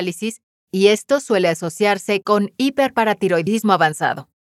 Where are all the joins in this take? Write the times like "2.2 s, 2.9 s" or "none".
none